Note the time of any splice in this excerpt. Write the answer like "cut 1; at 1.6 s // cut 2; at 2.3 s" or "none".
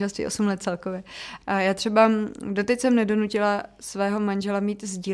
cut 1; at 1.4 s